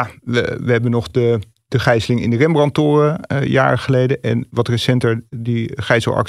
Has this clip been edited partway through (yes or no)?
no